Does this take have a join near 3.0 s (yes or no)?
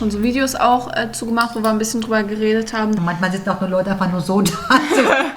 yes